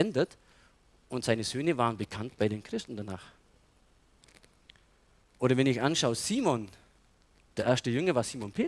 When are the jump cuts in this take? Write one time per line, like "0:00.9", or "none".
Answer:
none